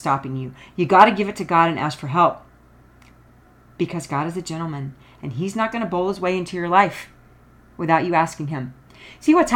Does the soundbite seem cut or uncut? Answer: uncut